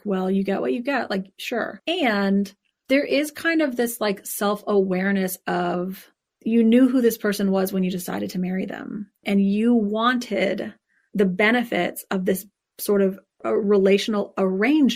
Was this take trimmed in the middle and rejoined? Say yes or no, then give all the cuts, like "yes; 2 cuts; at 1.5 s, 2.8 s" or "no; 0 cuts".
no; 0 cuts